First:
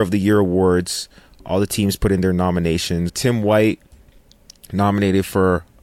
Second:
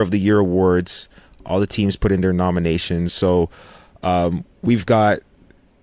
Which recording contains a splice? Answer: first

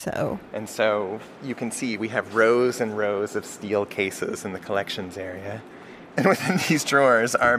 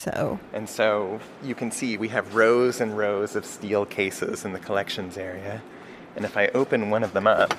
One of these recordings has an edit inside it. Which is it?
first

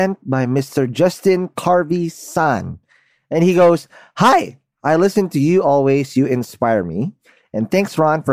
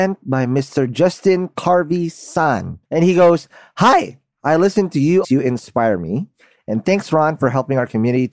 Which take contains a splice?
second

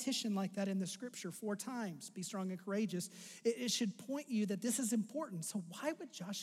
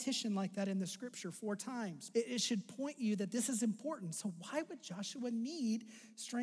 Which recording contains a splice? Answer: second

